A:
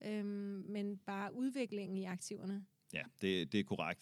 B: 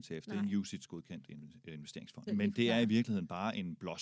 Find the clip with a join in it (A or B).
B